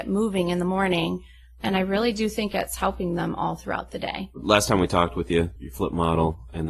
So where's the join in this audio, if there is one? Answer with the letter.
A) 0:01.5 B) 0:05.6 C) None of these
B